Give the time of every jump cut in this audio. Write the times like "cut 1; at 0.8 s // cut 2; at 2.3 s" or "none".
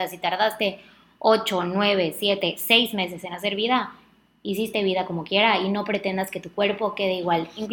none